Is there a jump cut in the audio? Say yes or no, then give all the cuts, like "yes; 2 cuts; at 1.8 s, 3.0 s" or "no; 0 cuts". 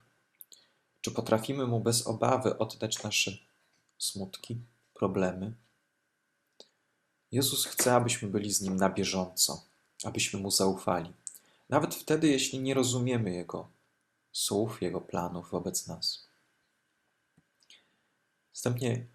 no; 0 cuts